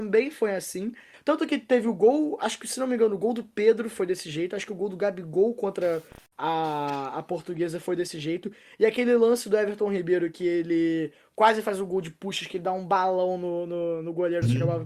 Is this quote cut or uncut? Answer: cut